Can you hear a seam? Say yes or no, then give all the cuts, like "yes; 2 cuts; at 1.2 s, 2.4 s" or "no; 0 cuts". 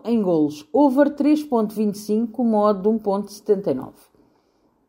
no; 0 cuts